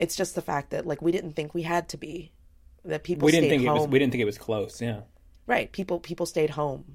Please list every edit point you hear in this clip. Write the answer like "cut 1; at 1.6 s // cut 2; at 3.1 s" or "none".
none